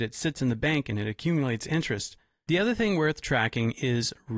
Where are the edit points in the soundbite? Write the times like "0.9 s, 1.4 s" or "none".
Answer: 2.5 s